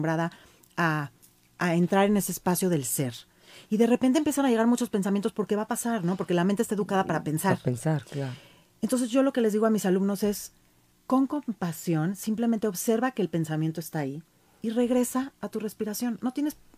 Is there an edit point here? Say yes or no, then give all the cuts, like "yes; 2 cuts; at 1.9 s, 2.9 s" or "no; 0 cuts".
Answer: no; 0 cuts